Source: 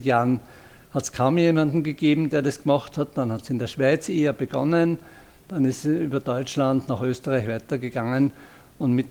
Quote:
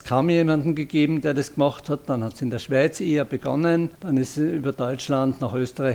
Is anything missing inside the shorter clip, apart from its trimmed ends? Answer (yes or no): yes